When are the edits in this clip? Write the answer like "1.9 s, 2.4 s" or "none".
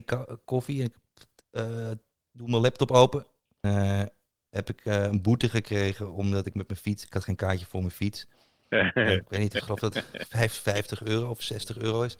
3.6 s, 9.2 s